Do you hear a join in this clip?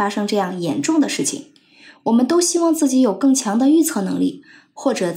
no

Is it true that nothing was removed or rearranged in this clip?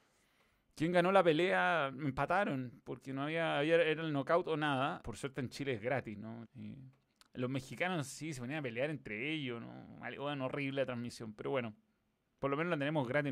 no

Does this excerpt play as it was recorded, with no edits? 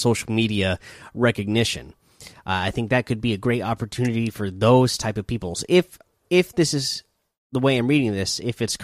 no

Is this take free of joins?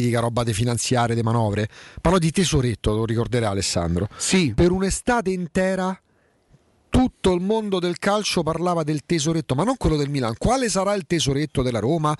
yes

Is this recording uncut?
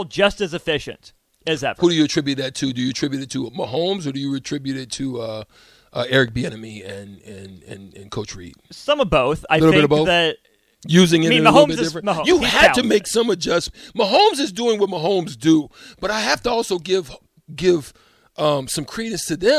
yes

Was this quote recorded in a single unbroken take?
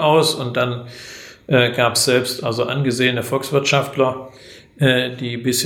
yes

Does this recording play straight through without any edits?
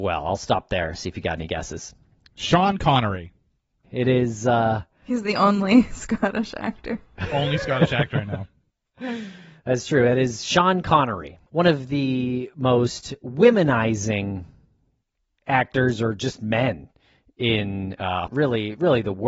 no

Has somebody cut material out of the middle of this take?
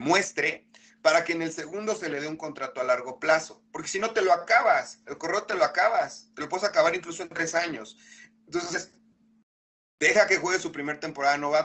no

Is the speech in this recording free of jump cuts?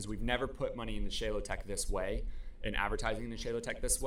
yes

